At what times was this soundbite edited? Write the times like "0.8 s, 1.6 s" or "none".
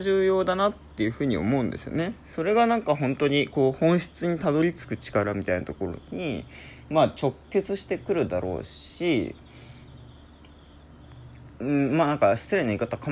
11.5 s